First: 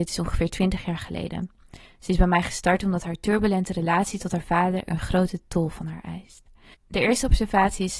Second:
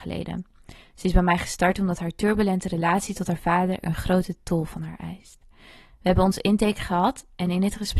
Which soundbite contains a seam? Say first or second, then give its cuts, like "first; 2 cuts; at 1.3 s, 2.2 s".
first; 1 cut; at 6.7 s